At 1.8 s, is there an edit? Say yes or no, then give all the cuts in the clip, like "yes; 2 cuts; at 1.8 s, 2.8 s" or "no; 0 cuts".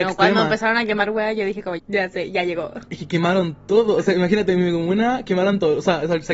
yes; 1 cut; at 1.8 s